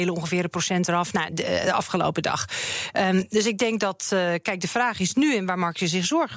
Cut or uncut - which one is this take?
cut